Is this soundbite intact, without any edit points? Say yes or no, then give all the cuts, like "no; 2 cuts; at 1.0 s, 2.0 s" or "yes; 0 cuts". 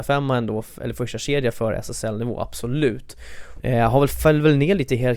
no; 1 cut; at 3.6 s